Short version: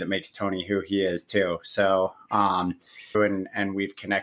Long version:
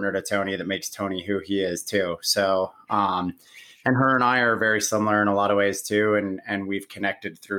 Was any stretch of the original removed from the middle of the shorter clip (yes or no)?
yes